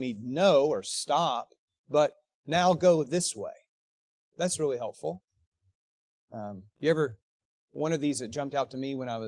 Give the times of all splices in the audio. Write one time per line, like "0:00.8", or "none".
0:06.2